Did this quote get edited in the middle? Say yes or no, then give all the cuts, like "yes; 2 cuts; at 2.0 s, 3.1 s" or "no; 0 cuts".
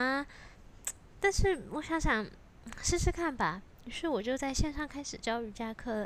no; 0 cuts